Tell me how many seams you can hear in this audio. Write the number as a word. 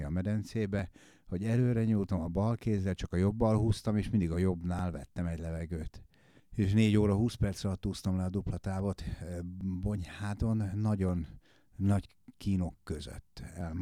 one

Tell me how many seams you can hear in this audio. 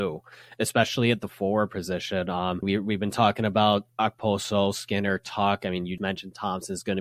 two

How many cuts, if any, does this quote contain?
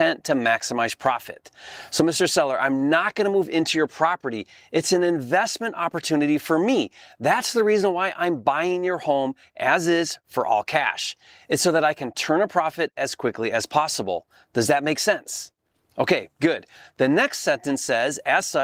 zero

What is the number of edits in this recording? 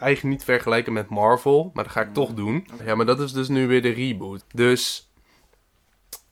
two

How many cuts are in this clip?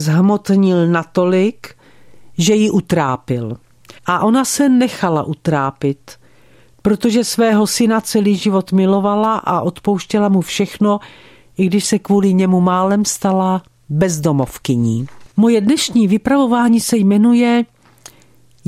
two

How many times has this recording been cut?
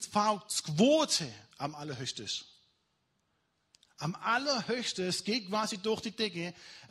zero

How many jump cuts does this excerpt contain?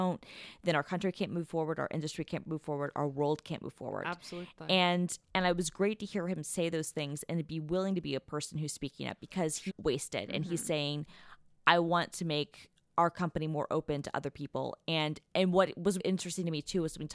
two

